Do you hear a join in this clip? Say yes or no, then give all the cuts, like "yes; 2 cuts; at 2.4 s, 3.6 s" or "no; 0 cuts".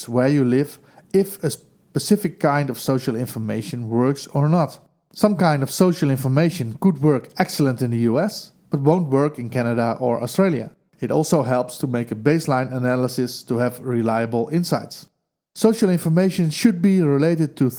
yes; 1 cut; at 10.9 s